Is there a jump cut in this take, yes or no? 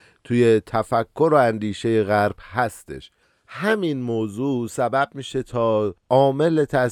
no